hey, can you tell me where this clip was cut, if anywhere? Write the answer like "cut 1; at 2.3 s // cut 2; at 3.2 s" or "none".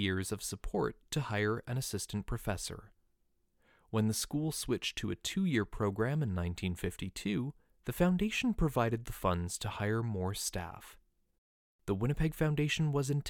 cut 1; at 7.7 s